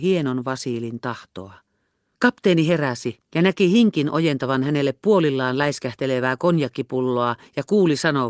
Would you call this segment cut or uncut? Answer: cut